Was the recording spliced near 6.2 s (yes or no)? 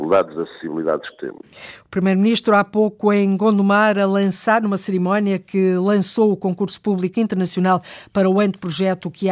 no